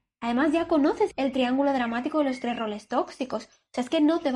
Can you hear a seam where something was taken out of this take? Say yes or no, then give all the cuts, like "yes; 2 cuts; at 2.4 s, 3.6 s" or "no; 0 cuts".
no; 0 cuts